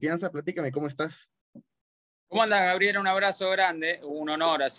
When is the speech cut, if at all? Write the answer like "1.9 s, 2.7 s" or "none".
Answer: none